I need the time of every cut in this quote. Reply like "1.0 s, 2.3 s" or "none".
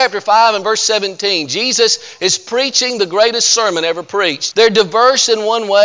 4.5 s

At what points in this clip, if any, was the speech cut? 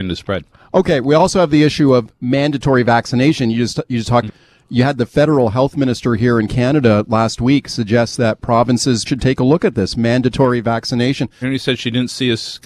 4.3 s, 9.1 s, 11.4 s

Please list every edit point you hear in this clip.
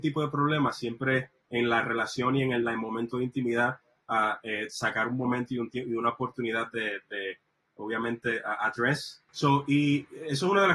none

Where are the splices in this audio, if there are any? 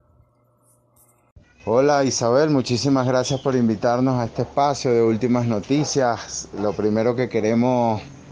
none

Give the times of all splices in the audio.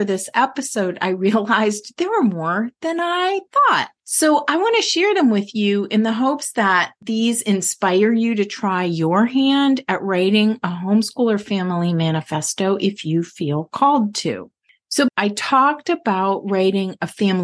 15.1 s

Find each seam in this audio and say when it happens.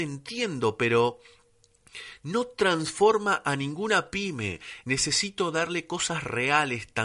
4.8 s

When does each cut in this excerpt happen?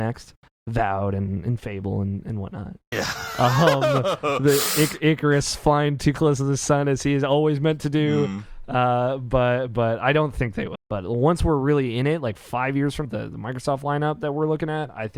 2.9 s, 10.8 s, 13.0 s

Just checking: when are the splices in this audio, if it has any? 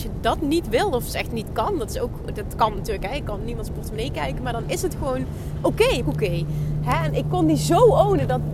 6.0 s

